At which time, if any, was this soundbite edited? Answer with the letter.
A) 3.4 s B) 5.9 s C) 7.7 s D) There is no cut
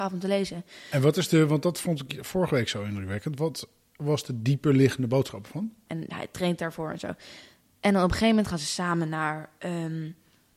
B